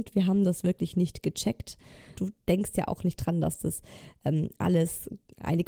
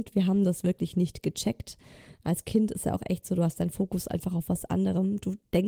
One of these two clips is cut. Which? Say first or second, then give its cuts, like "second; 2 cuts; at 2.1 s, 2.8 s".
first; 1 cut; at 2.2 s